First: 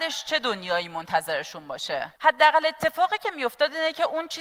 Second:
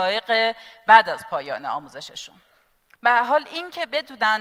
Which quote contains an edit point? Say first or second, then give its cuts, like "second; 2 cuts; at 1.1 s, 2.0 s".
first; 1 cut; at 2.2 s